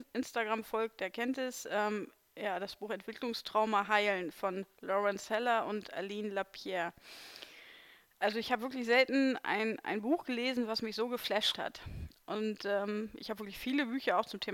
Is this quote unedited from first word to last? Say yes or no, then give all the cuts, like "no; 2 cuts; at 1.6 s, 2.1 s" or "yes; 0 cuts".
yes; 0 cuts